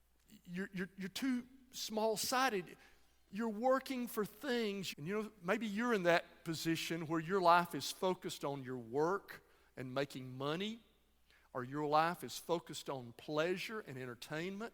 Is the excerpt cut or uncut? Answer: cut